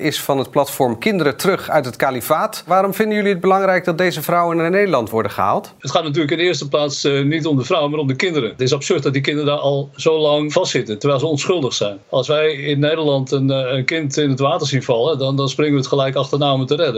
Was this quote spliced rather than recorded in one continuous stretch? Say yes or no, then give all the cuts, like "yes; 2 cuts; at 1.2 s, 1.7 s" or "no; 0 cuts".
no; 0 cuts